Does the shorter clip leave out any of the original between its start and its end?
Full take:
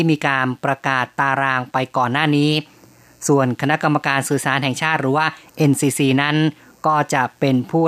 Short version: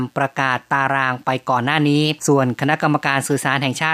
yes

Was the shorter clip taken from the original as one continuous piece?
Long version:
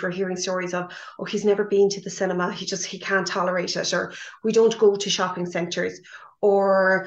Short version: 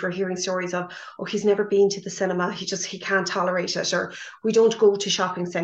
yes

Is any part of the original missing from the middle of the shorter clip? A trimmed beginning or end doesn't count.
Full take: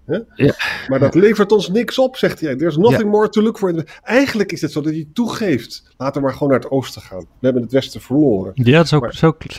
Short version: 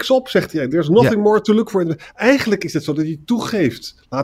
no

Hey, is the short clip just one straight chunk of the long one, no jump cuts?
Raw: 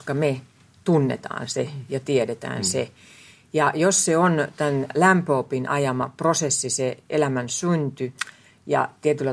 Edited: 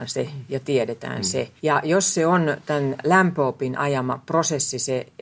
no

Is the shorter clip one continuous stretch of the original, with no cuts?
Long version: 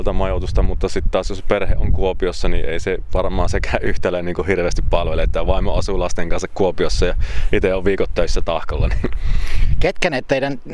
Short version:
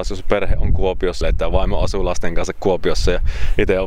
no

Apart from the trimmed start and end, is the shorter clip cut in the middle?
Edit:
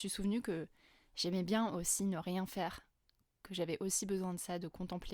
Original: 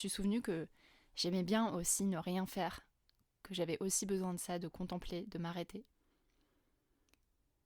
no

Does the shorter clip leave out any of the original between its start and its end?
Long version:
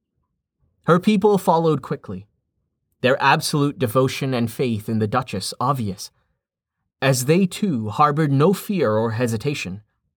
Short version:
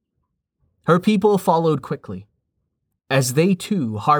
yes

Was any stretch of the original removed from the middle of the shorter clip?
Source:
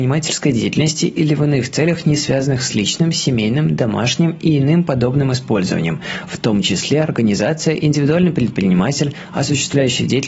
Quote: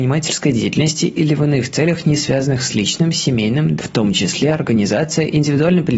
yes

